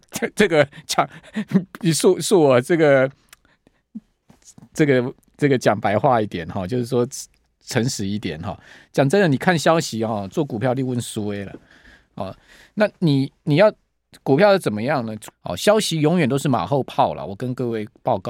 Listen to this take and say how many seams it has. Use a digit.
1